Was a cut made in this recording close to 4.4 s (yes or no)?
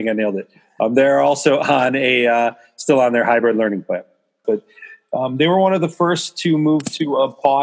yes